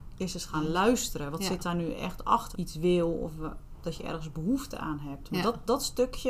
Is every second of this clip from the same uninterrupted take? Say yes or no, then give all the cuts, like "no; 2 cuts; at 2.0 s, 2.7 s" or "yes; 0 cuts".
no; 1 cut; at 2.5 s